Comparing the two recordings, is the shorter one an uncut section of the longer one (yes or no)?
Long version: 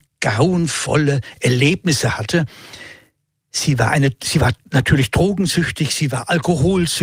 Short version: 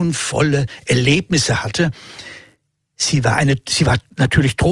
yes